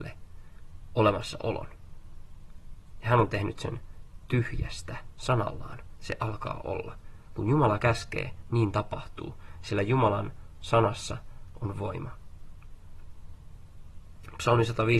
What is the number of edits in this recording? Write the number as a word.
one